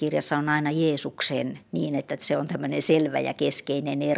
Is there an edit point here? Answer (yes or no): yes